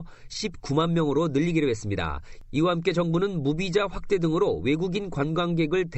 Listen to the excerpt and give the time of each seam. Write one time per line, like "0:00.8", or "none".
none